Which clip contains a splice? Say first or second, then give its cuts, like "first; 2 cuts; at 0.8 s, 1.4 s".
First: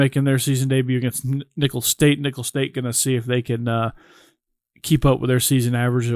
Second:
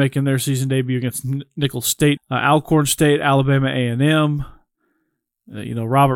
second; 1 cut; at 2.2 s